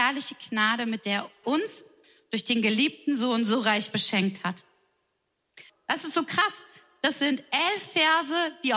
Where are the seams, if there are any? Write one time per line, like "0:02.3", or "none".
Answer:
0:01.4
0:05.7